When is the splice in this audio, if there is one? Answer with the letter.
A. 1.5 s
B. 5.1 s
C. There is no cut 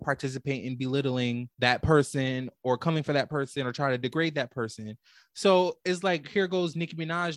A